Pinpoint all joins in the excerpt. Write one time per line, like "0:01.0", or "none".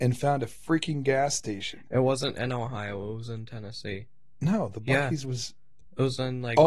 none

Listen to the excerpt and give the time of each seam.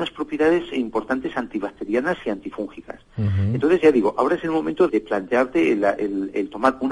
0:04.9

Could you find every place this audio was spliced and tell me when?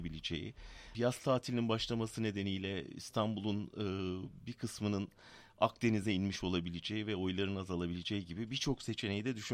0:00.9

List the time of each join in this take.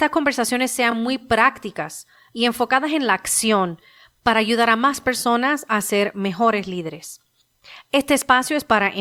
none

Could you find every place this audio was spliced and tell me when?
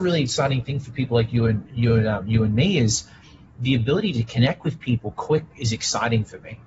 0:05.1

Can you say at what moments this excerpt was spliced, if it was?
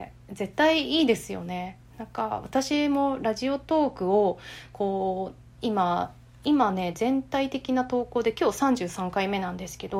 none

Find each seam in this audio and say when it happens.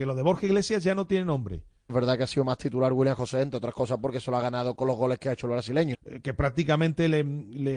0:01.9
0:04.8
0:05.9

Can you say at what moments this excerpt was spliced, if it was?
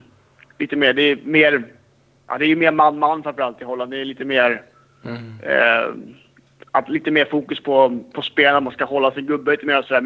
none

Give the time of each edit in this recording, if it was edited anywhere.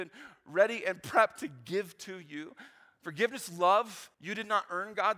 0:04.1

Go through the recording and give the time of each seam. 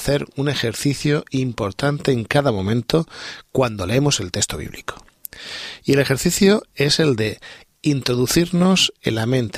none

